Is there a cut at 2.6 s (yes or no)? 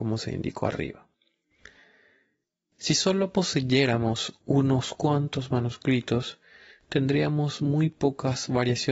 no